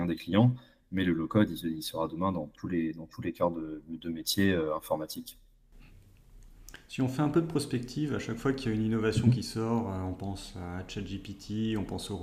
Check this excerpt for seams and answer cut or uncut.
uncut